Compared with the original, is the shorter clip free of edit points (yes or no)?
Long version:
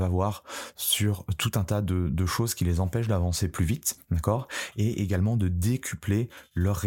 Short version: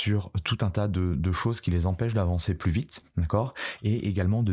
yes